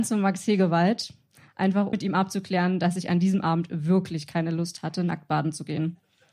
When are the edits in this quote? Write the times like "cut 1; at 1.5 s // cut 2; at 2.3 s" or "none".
cut 1; at 1.9 s